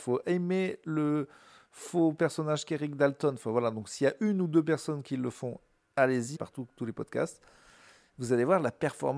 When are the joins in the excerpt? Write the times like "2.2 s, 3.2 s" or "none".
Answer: 6.3 s

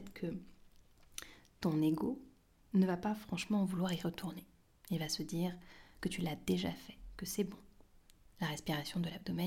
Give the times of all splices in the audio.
none

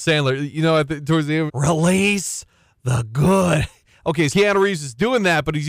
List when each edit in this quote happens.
1.5 s, 4.3 s

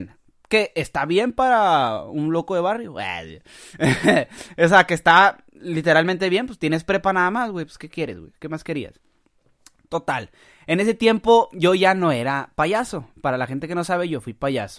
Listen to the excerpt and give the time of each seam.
none

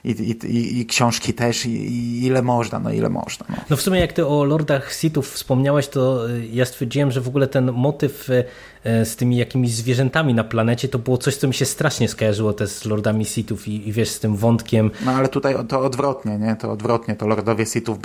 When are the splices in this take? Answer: none

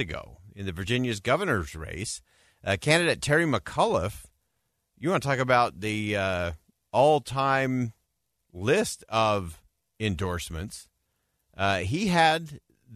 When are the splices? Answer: none

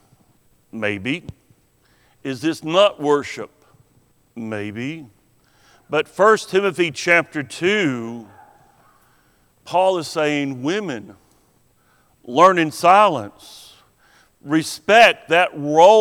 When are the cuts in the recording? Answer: none

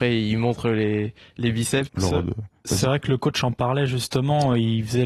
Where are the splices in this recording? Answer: 1.9 s

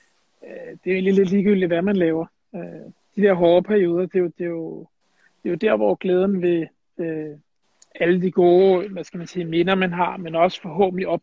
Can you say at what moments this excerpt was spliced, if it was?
none

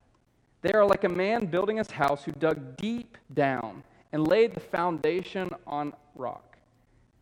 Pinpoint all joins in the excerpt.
3.2 s

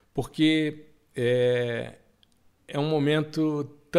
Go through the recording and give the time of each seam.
none

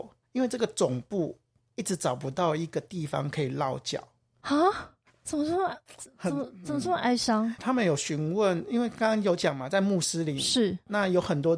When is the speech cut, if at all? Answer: 7.6 s

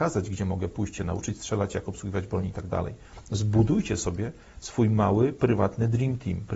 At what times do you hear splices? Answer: none

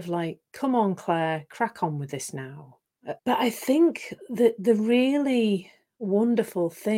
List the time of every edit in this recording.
3.2 s

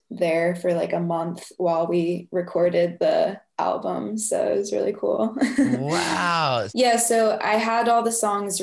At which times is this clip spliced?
6.7 s

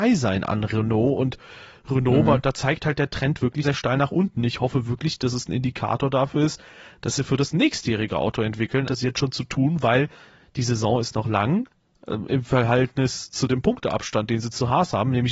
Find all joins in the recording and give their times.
3.6 s, 8.8 s

